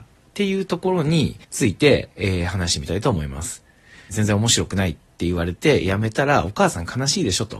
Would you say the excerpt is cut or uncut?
cut